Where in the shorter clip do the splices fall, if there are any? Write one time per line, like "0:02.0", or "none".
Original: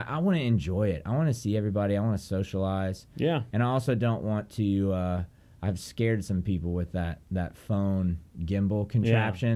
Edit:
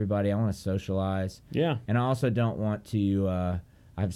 none